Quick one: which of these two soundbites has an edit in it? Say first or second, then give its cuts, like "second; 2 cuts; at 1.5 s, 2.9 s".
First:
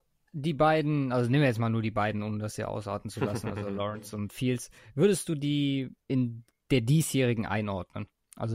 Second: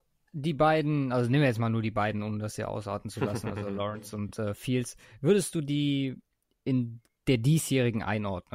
first; 2 cuts; at 4.3 s, 6.0 s